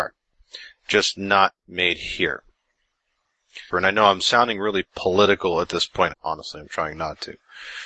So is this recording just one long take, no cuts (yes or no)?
no